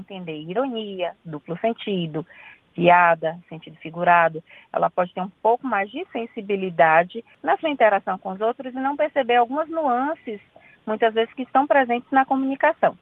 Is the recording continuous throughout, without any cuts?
yes; 0 cuts

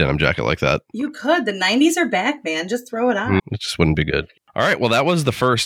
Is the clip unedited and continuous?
no; 1 cut; at 3.4 s

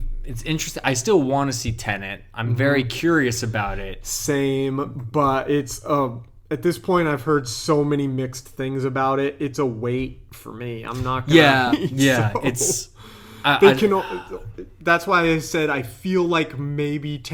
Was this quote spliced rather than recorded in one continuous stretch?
yes; 1 cut; at 11.7 s

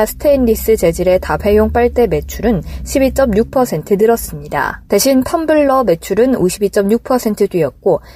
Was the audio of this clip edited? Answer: yes; 1 cut; at 4.9 s

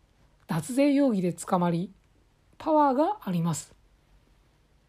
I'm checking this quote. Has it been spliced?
yes; 1 cut; at 2.5 s

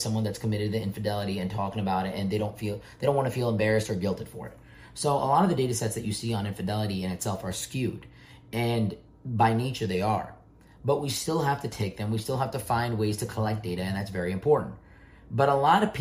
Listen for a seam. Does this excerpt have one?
no; 0 cuts

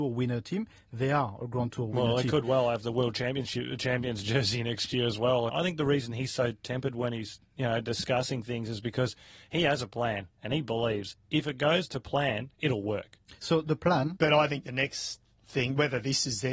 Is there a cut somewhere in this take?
yes; 2 cuts; at 5.5 s, 14.2 s

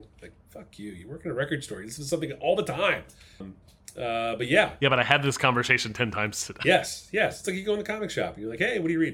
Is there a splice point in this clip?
yes; 1 cut; at 3.4 s

